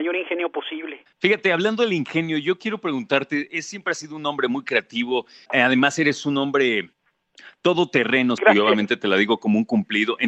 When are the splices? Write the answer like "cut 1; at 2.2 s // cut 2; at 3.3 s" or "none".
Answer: cut 1; at 8.4 s